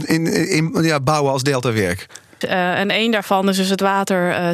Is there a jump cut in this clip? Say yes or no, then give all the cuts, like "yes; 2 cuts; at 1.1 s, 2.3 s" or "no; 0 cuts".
yes; 1 cut; at 2.4 s